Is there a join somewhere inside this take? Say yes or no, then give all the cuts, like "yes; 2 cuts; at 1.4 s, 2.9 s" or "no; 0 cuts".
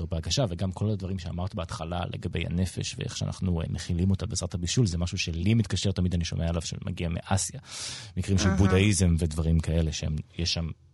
yes; 1 cut; at 3.7 s